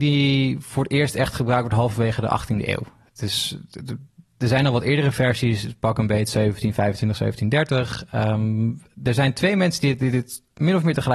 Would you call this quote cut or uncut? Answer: uncut